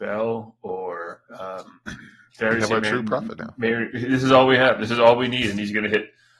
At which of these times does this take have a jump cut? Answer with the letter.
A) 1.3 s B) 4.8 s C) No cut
A